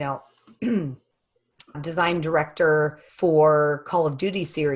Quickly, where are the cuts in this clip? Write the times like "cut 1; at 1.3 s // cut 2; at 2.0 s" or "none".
cut 1; at 1.7 s // cut 2; at 3.1 s